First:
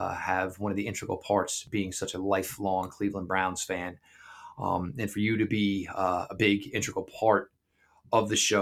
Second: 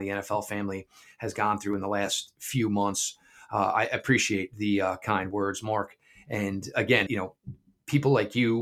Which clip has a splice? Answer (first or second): second